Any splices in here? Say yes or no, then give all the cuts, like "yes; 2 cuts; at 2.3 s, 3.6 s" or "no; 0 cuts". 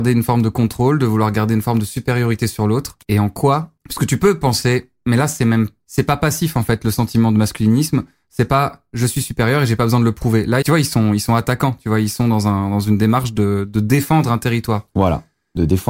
yes; 1 cut; at 10.6 s